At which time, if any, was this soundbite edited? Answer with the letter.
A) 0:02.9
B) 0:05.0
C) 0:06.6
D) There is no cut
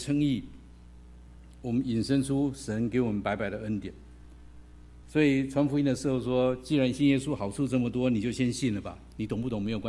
B